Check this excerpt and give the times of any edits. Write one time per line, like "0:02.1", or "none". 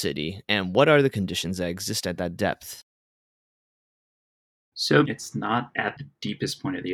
0:05.0